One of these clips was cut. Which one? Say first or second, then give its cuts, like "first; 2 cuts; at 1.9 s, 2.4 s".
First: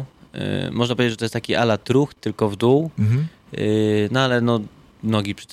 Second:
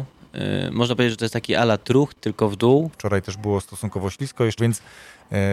second; 2 cuts; at 2.9 s, 4.6 s